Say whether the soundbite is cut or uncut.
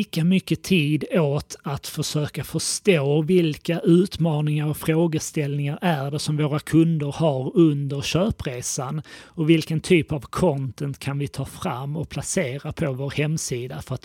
uncut